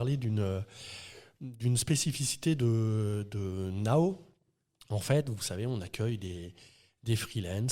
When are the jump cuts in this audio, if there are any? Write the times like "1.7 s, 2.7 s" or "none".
none

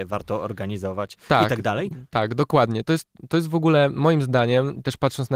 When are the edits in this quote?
none

